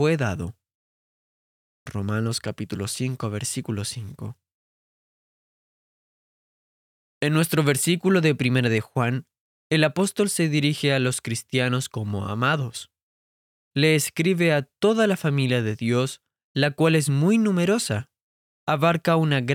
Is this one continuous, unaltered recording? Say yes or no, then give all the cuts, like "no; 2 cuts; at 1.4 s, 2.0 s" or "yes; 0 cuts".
yes; 0 cuts